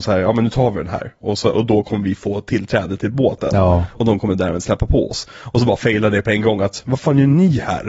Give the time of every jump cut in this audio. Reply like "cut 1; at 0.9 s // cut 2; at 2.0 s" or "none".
none